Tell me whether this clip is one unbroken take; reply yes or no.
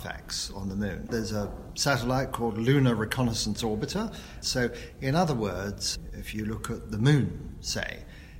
no